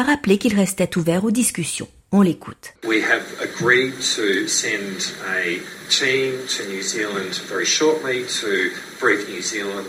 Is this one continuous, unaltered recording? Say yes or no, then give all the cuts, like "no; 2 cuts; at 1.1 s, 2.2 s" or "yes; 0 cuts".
yes; 0 cuts